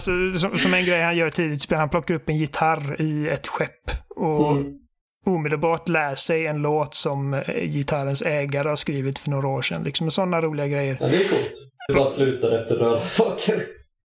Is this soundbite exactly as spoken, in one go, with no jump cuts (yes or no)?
no